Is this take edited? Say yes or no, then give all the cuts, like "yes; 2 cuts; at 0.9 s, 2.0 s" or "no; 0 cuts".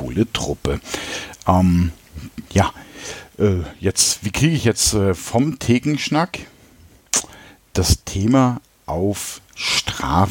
no; 0 cuts